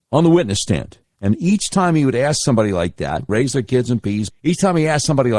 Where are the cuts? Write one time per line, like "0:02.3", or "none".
0:01.0
0:03.3
0:04.3